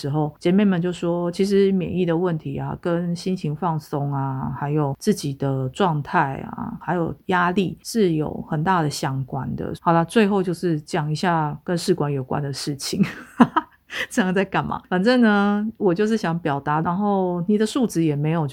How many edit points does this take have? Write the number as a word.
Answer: two